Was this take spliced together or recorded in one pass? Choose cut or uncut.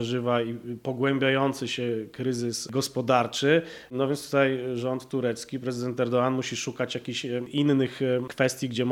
uncut